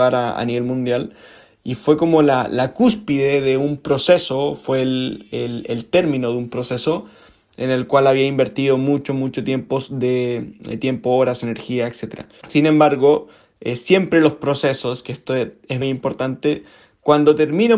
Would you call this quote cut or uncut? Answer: cut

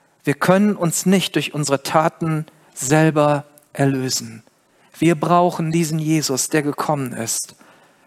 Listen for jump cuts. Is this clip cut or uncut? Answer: uncut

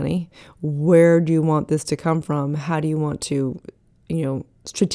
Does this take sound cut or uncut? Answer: uncut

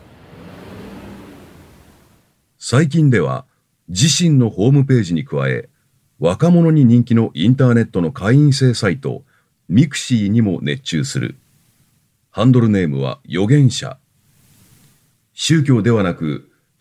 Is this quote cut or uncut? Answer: uncut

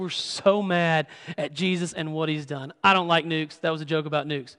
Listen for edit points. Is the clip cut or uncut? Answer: uncut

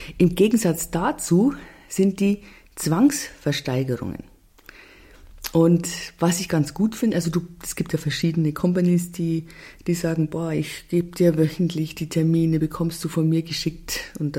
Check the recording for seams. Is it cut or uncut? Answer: uncut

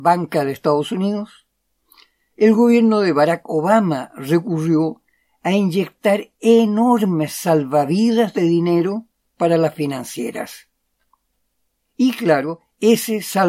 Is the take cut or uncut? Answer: uncut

